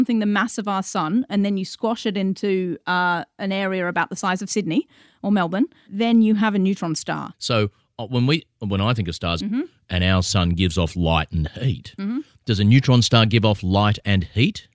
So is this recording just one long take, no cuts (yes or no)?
no